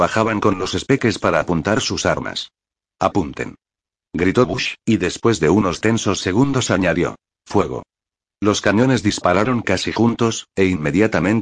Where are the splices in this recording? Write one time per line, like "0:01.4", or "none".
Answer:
none